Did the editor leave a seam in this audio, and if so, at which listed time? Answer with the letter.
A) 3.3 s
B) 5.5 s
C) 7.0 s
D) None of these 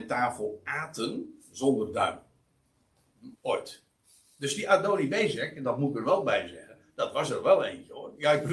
A